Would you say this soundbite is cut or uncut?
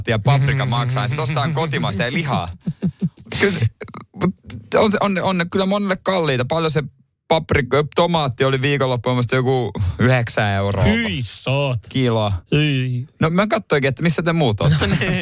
uncut